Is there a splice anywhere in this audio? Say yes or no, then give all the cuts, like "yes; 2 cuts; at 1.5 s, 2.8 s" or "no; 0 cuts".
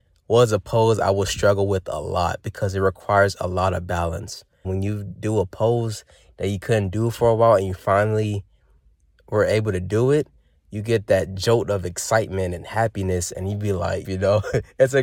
yes; 2 cuts; at 4.6 s, 14.0 s